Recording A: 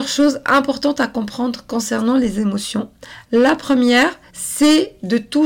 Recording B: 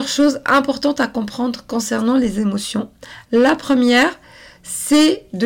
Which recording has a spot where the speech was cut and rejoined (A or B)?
A